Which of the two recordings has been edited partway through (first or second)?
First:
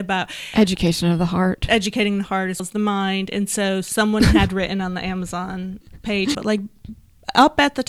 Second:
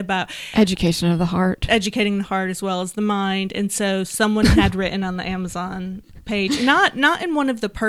first